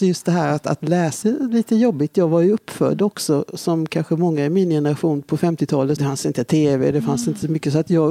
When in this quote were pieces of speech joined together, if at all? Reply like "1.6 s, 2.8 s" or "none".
1.2 s, 6.0 s